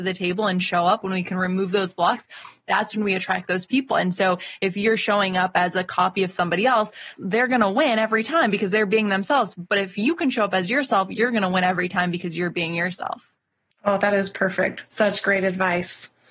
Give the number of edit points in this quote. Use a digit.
2